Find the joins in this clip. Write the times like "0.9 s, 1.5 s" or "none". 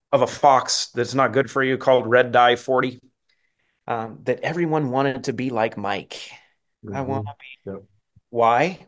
7.5 s